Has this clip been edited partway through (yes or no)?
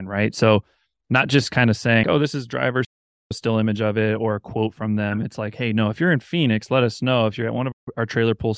yes